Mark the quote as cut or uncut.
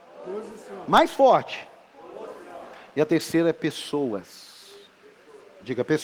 uncut